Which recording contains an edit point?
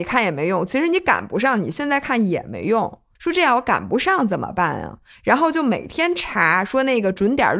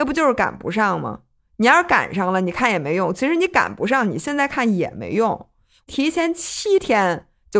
first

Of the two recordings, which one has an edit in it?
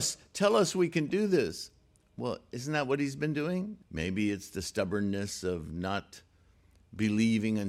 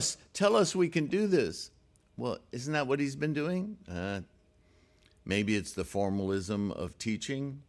first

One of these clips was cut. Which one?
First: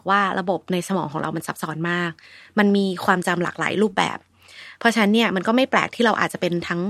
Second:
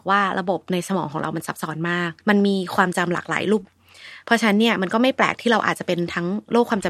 second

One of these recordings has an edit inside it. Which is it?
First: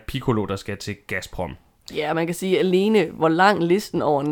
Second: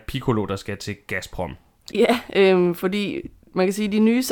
second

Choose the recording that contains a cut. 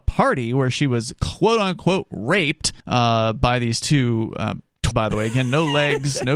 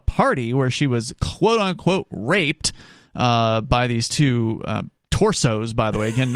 first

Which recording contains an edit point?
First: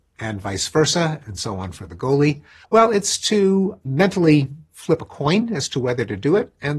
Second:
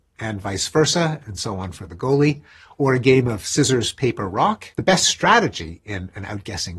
first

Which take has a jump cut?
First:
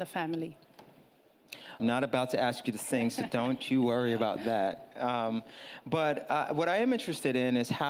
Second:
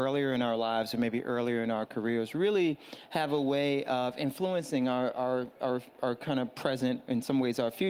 first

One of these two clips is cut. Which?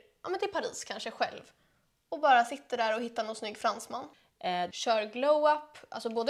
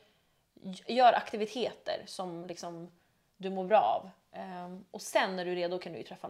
first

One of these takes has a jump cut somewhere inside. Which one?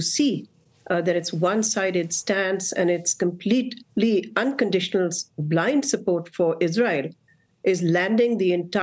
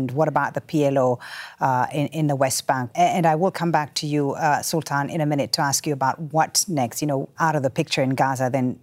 second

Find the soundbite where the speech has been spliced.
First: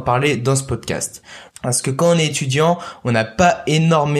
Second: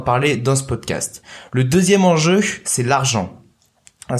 first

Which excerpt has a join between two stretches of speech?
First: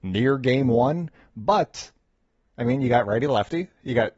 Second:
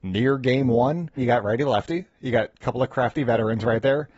second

